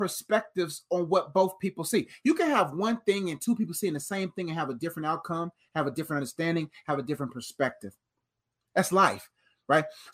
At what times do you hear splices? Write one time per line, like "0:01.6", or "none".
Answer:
none